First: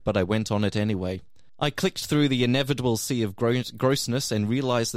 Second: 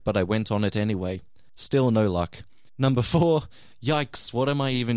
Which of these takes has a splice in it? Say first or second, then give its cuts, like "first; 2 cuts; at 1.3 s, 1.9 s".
second; 1 cut; at 1.6 s